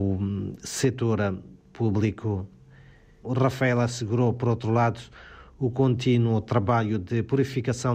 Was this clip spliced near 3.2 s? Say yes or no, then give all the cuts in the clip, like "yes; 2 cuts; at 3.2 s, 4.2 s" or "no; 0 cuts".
yes; 1 cut; at 3.2 s